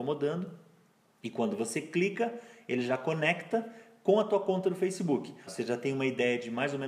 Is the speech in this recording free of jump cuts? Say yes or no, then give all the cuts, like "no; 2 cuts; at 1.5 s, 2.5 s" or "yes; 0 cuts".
no; 1 cut; at 5.5 s